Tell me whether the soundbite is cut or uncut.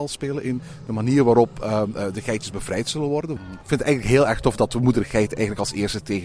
cut